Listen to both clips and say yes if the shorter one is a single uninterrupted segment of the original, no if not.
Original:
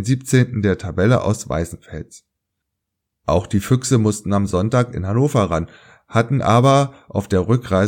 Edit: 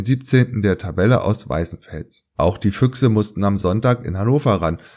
no